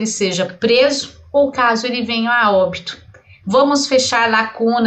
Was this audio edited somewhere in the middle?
yes; 1 cut; at 3.4 s

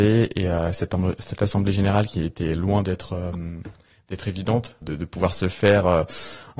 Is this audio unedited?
no; 1 cut; at 4.8 s

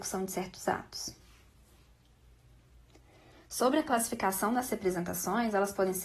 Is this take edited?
no; 0 cuts

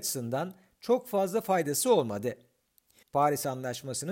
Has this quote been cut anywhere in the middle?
yes; 1 cut; at 3.0 s

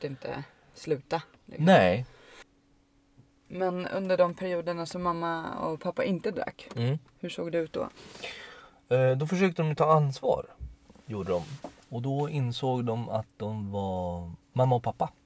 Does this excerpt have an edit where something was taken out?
no; 0 cuts

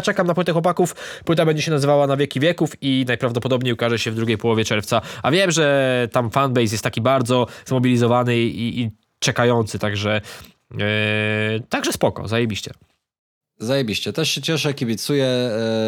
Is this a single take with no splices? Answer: yes; 0 cuts

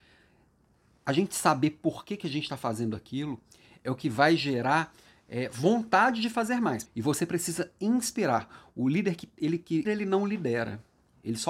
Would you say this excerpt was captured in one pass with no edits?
no; 2 cuts; at 6.9 s, 9.8 s

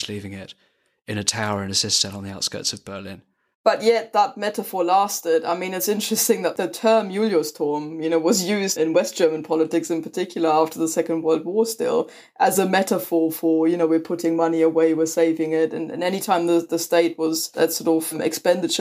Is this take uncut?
no; 1 cut; at 8.8 s

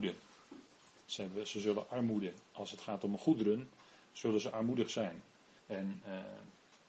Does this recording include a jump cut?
yes; 2 cuts; at 1.0 s, 5.6 s

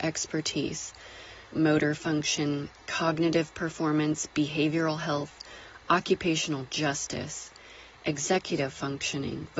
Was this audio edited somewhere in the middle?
yes; 2 cuts; at 1.5 s, 5.8 s

